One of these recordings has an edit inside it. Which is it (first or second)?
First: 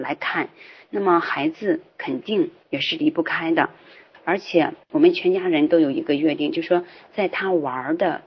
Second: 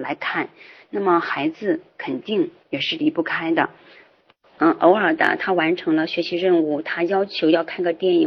first